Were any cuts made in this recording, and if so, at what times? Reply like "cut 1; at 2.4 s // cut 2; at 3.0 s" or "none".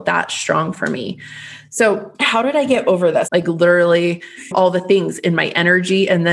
cut 1; at 2.1 s // cut 2; at 3.2 s // cut 3; at 4.4 s